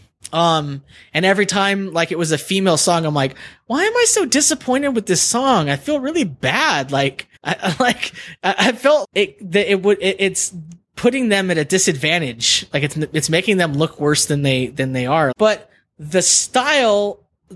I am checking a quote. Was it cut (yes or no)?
yes